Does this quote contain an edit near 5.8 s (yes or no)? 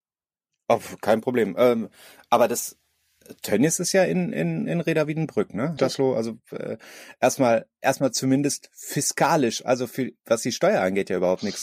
yes